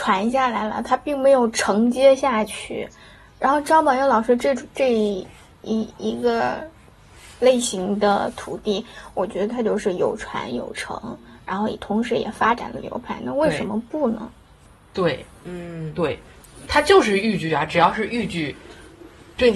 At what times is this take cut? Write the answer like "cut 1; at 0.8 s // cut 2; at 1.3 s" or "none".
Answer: none